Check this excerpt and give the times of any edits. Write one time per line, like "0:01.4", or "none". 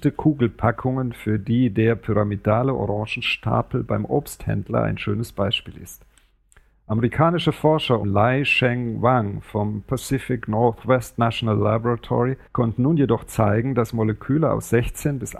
0:08.0
0:12.5